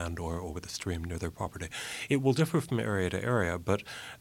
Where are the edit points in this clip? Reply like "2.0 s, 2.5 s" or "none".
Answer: none